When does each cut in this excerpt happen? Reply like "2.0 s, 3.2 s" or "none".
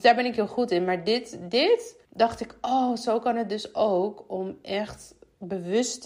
2.0 s